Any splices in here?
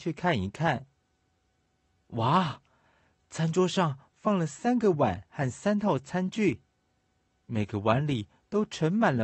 no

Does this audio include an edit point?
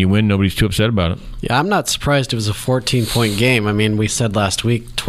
no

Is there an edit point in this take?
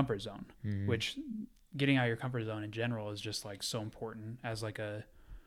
no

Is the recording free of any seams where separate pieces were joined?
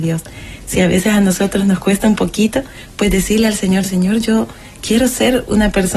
yes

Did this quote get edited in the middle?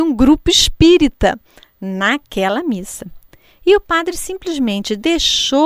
no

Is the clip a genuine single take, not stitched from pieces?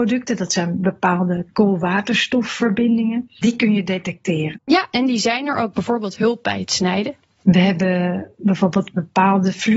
no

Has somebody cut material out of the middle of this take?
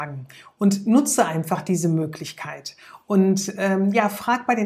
no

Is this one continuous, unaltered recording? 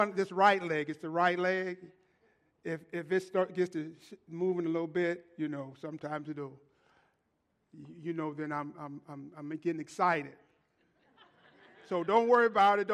yes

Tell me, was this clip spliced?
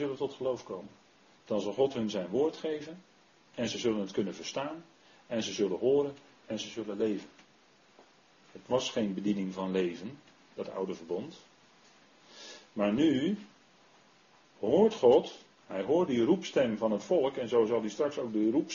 yes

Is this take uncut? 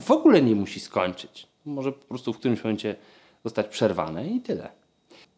yes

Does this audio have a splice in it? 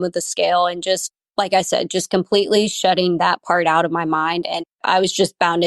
no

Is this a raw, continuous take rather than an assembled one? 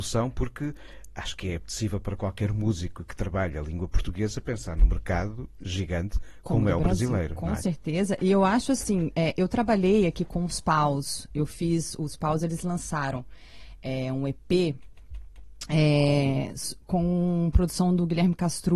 yes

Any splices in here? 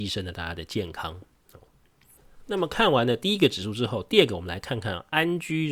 no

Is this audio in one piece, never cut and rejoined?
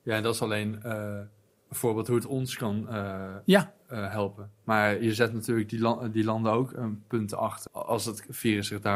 no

